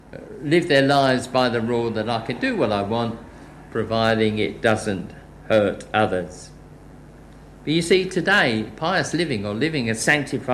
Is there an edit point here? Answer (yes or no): no